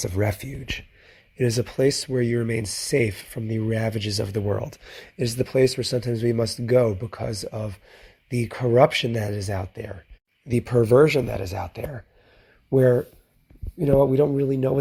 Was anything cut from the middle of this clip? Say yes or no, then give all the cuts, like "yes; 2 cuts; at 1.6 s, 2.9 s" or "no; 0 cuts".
no; 0 cuts